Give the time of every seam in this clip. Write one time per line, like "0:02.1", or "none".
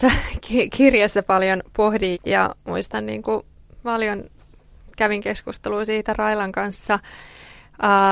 0:02.1